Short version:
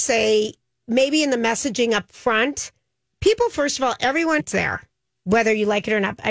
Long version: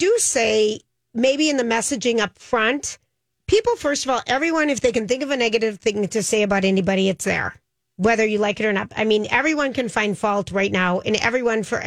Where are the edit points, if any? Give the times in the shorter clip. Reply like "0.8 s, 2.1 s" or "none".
4.4 s